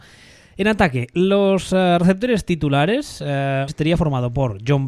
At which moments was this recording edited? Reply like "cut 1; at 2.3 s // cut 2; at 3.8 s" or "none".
cut 1; at 3.7 s